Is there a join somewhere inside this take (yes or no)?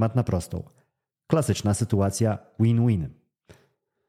yes